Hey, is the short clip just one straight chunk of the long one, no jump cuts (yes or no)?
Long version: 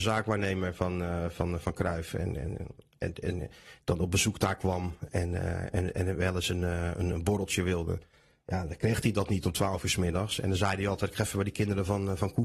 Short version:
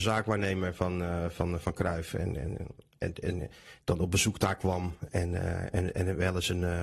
yes